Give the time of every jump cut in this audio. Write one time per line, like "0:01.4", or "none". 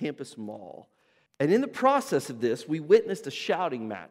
0:01.3